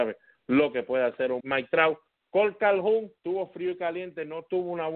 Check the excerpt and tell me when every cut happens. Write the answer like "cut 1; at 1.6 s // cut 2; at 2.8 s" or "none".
cut 1; at 1.4 s // cut 2; at 3.2 s